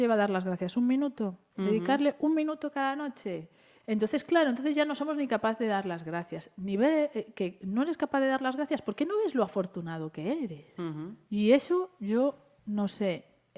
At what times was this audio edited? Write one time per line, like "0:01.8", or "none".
0:01.5
0:03.8
0:11.3